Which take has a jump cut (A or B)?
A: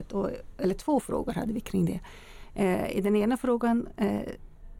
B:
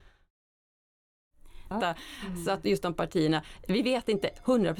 B